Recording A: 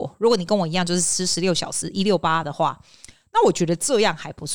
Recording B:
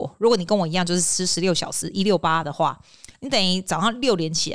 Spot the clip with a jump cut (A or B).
B